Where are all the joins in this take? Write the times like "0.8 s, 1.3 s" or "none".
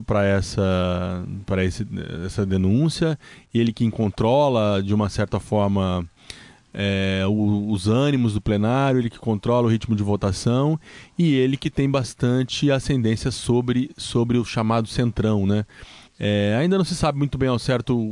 16.1 s

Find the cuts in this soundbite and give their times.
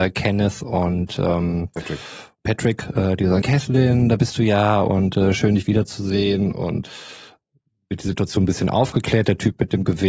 3.4 s

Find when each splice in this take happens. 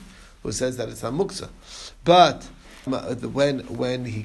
2.9 s

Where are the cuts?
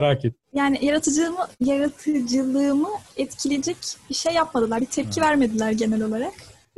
3.1 s

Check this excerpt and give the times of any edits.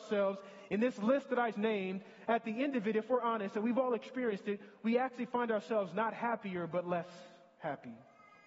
1.5 s

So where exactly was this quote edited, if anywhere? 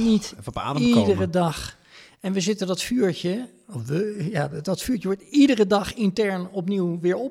none

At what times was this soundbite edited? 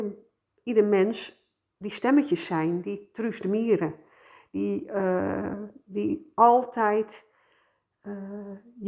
none

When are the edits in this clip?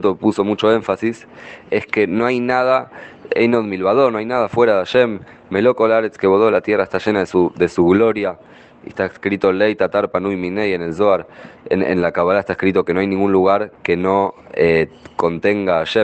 none

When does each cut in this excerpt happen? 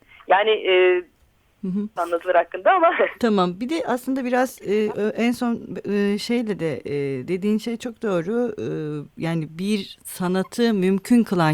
2.0 s

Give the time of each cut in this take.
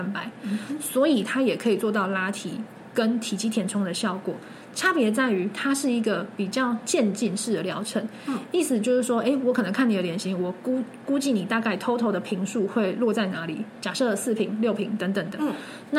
none

